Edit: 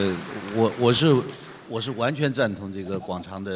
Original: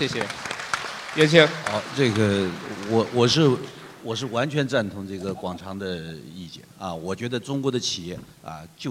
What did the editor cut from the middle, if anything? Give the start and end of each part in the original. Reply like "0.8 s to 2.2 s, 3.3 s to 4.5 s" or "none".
none